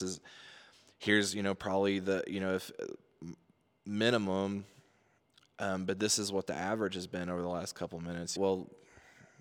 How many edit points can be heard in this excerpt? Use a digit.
1